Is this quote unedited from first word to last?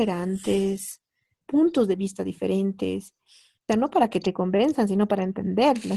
no; 2 cuts; at 1.4 s, 3.7 s

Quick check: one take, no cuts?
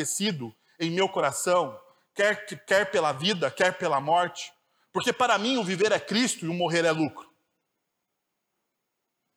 yes; 0 cuts

